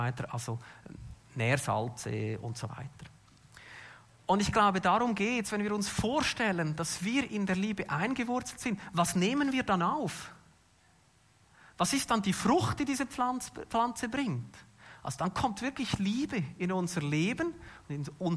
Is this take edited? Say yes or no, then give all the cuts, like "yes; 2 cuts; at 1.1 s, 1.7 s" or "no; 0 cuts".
no; 0 cuts